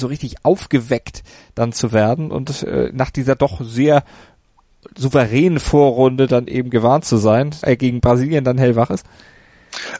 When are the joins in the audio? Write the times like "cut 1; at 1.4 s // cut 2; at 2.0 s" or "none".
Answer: cut 1; at 7.6 s